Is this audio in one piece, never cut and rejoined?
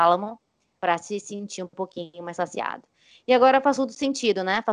yes; 0 cuts

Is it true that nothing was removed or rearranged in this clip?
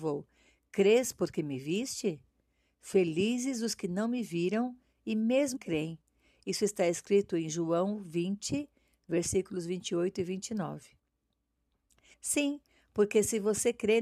no; 2 cuts; at 5.6 s, 12.1 s

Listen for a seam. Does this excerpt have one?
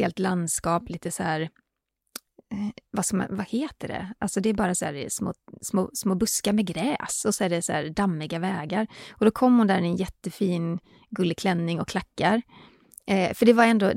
no; 0 cuts

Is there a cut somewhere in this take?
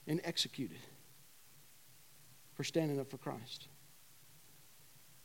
no; 0 cuts

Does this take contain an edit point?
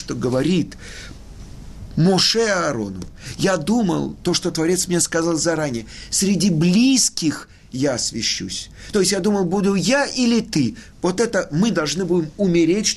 no; 0 cuts

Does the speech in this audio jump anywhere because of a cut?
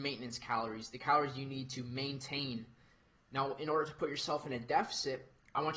no; 0 cuts

